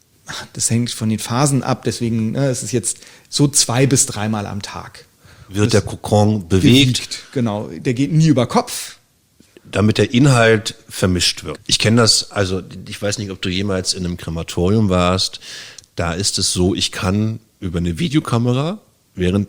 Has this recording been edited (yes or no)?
yes